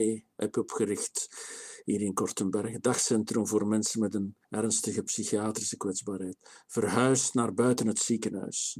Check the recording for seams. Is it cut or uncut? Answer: cut